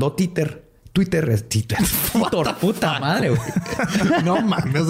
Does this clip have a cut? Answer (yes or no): no